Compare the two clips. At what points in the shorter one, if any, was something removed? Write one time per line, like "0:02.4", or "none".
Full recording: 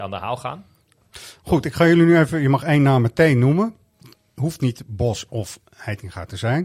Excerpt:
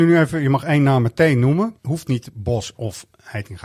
0:01.8